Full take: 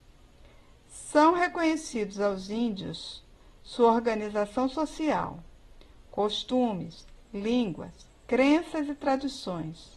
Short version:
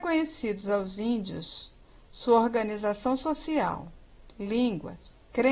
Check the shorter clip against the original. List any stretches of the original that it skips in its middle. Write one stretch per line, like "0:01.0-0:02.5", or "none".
0:05.8-0:07.3